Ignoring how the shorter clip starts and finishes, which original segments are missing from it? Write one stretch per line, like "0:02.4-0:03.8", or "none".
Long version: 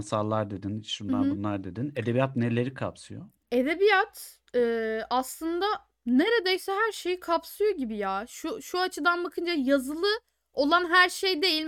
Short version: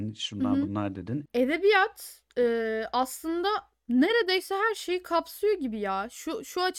0:01.9-0:03.4